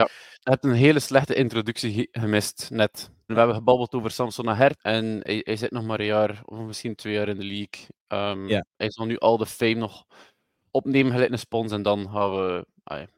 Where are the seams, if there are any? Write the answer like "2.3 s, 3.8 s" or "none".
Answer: 3.3 s, 4.8 s